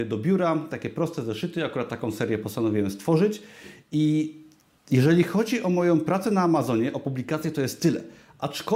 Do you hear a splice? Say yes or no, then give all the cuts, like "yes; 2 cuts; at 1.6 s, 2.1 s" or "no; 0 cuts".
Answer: no; 0 cuts